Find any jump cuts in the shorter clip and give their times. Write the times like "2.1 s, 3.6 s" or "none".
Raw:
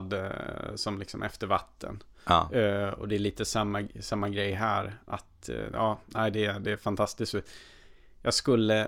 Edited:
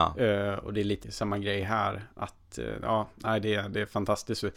1.0 s